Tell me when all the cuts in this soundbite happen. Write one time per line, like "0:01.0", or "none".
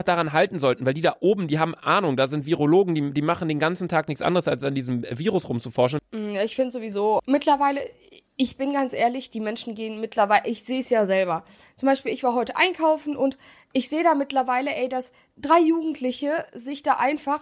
0:06.0
0:07.2